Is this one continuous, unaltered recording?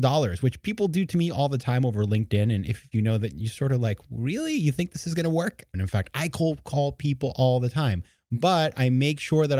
no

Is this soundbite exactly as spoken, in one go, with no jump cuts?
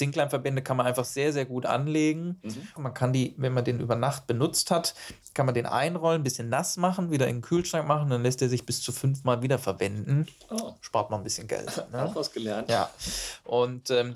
no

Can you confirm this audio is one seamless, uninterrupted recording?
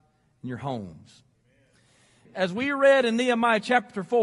no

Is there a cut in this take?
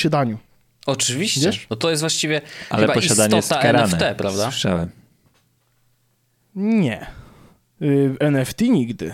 no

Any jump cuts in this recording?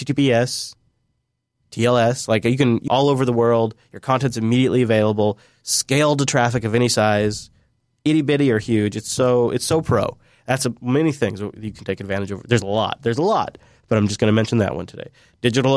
yes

